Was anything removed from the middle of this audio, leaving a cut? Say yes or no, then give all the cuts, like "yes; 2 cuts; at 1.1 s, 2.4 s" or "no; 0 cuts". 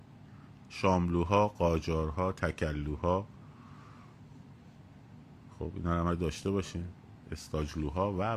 no; 0 cuts